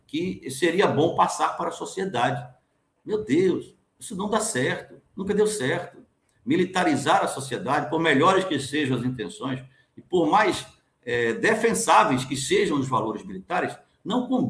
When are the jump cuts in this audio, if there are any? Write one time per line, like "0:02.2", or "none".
none